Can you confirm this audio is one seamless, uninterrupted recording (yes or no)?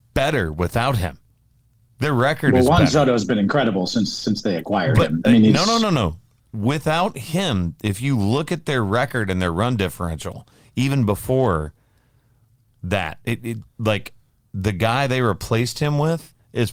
yes